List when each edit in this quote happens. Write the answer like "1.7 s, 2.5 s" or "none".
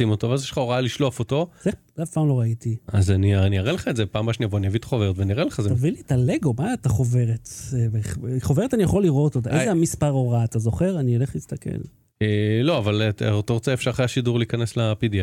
none